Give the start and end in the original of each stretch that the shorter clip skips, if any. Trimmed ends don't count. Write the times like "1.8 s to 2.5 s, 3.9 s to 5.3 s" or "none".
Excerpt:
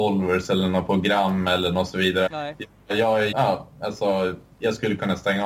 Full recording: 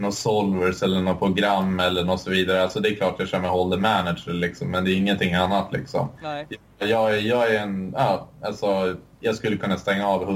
2.6 s to 6.2 s, 7.2 s to 7.9 s